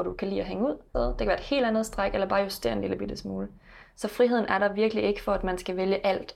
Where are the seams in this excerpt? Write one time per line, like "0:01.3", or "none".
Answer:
0:00.9